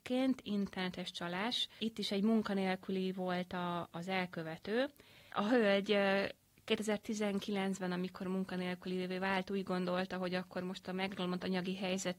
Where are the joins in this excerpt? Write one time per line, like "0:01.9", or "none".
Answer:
none